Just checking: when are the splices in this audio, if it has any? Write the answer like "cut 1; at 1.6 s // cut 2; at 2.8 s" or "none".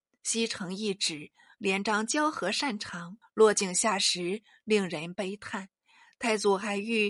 cut 1; at 3.2 s